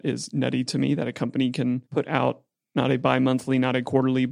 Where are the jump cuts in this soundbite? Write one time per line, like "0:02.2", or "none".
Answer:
0:01.9